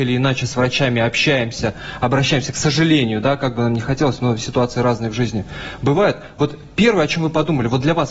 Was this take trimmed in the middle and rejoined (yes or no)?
no